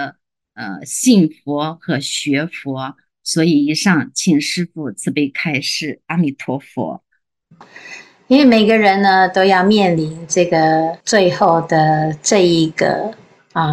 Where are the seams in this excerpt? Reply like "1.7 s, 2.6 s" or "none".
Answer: 7.6 s, 11.0 s